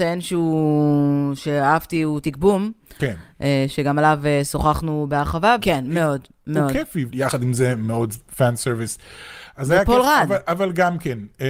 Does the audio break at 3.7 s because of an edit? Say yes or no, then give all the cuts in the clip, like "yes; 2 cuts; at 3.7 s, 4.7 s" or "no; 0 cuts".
no; 3 cuts; at 2.2 s, 5.6 s, 7.1 s